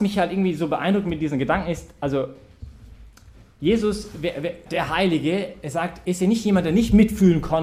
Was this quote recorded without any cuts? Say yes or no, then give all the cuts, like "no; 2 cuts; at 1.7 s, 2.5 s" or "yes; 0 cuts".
no; 2 cuts; at 4.7 s, 6.0 s